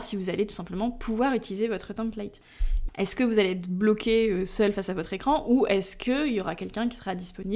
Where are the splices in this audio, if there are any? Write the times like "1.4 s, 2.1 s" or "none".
2.9 s

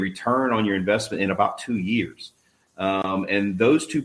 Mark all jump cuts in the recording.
2.6 s

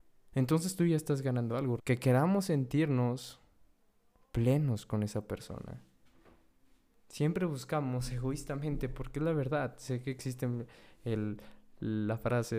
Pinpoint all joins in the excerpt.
1.8 s

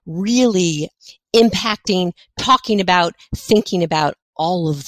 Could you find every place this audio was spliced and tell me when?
none

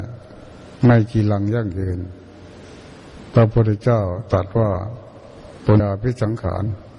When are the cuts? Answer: 5.8 s

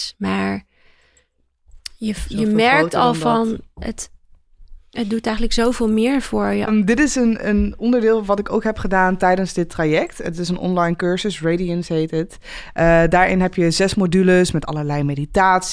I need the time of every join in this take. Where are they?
6.7 s

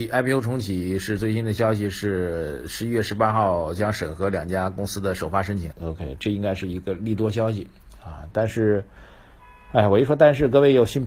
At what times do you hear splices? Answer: 5.7 s

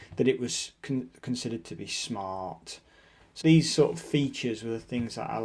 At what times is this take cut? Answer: 3.4 s

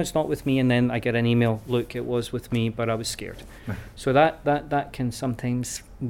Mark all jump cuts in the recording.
none

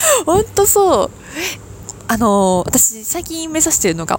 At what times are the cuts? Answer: none

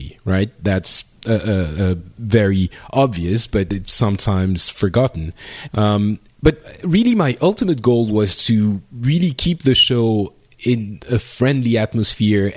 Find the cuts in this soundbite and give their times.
5.7 s

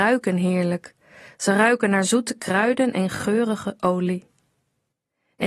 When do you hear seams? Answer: none

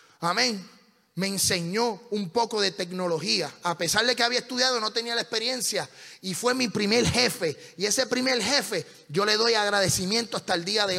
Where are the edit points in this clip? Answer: none

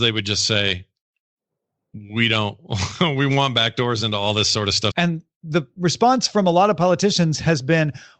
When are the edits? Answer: 4.9 s

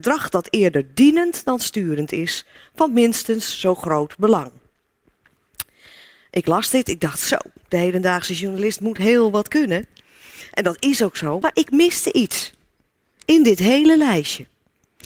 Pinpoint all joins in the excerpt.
11.4 s

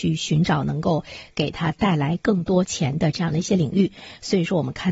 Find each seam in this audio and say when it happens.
none

